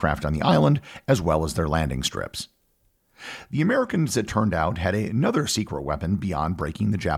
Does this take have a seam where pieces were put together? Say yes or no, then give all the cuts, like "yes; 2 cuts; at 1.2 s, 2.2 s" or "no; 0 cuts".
no; 0 cuts